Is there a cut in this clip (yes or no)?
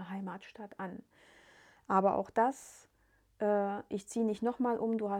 no